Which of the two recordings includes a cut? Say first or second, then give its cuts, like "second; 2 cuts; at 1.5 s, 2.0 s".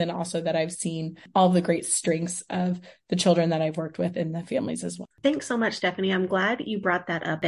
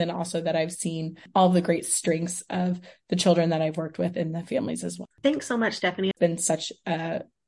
second; 1 cut; at 6.1 s